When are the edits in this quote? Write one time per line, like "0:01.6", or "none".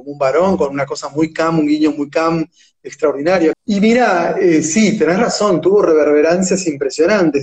0:03.5